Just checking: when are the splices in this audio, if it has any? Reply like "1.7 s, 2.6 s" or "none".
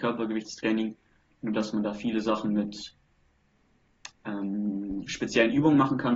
none